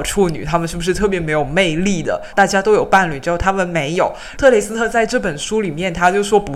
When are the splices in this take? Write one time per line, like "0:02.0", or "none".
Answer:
0:02.3